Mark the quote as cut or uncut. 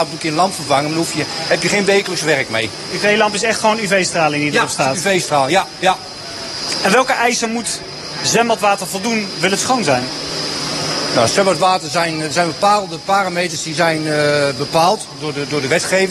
uncut